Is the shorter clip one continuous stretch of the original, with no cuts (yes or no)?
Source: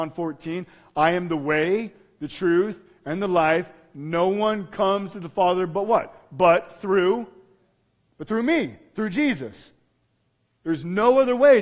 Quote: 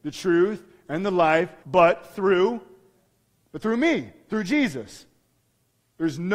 no